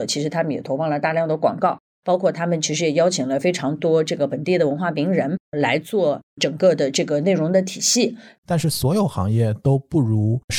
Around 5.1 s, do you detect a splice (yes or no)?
no